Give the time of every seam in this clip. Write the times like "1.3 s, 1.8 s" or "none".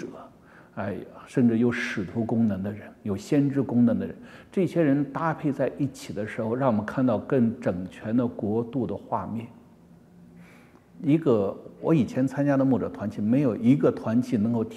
none